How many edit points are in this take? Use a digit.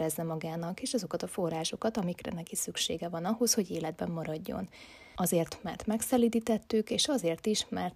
1